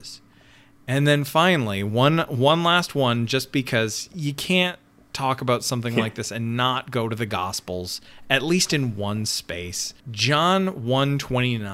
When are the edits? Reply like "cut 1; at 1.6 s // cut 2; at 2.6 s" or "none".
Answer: cut 1; at 10.0 s

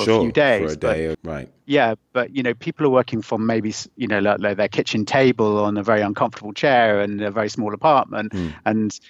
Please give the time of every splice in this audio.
cut 1; at 1.1 s

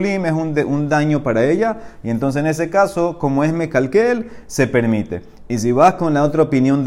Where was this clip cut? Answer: none

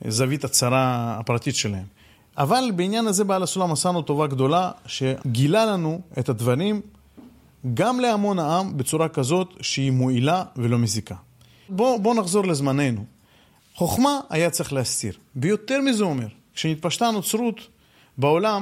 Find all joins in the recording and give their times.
cut 1; at 2.2 s // cut 2; at 13.6 s

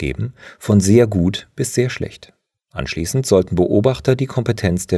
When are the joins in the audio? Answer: none

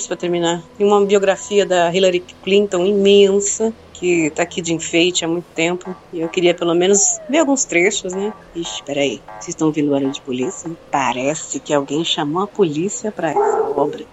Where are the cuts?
none

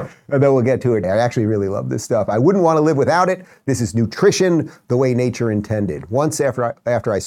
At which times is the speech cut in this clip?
cut 1; at 1.0 s

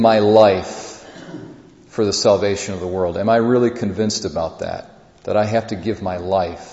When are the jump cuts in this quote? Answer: none

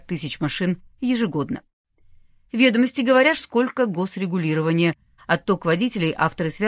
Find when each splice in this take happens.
cut 1; at 3.4 s // cut 2; at 5.1 s

